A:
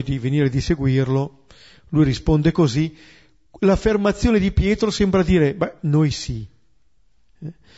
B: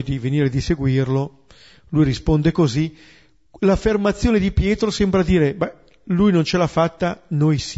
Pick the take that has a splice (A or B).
A